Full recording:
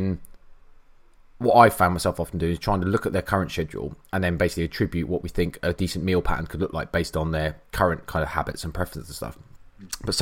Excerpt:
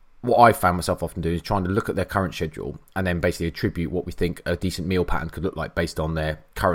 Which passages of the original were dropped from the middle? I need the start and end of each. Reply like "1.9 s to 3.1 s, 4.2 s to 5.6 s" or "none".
none